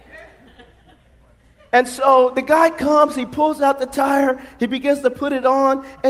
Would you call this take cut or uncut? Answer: uncut